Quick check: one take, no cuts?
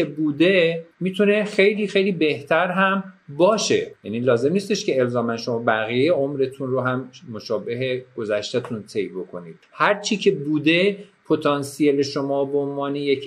no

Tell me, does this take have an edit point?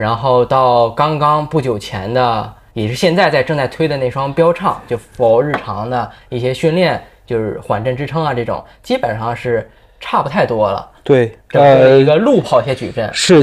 no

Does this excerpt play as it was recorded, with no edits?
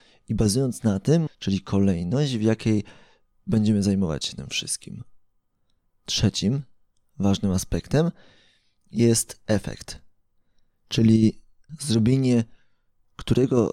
no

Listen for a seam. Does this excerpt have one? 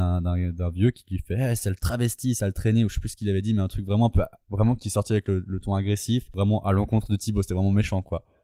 no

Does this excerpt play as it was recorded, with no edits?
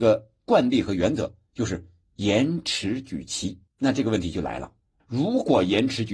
no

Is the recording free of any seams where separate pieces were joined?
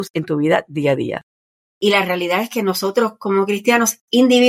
no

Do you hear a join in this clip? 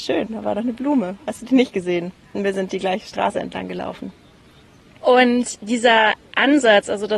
no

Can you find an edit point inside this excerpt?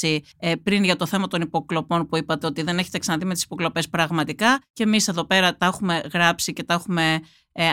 no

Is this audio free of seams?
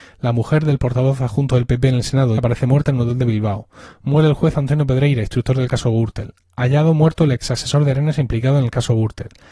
no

